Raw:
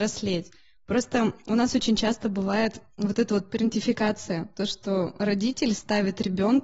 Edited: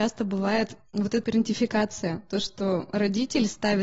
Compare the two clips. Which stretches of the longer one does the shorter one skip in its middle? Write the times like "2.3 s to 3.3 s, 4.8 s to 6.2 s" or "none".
3.3 s to 3.5 s

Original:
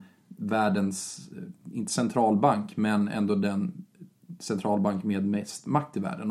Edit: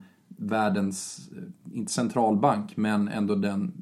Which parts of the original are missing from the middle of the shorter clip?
none

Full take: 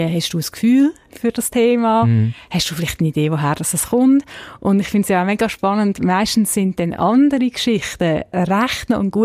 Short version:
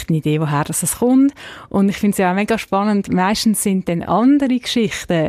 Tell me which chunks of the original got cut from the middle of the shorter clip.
none

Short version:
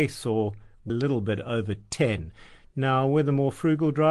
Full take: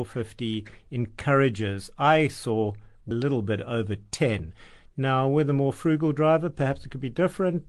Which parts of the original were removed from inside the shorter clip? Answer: none

